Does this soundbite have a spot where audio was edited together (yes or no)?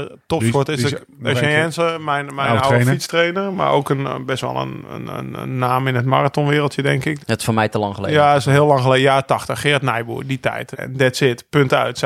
yes